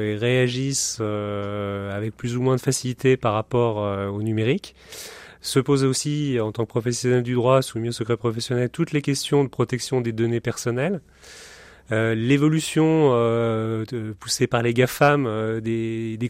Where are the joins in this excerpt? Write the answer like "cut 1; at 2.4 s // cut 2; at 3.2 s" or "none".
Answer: none